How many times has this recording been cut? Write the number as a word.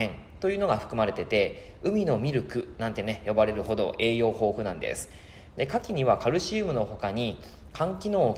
one